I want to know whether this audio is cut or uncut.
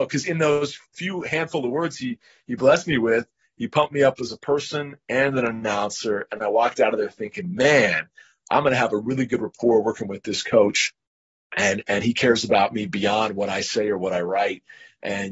uncut